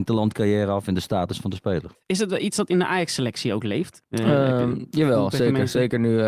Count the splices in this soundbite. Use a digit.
2